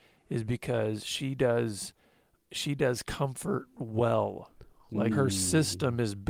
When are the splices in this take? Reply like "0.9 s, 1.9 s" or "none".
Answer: 2.3 s, 5.1 s